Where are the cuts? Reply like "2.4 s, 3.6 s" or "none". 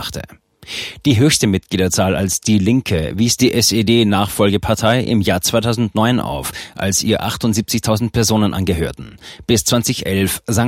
none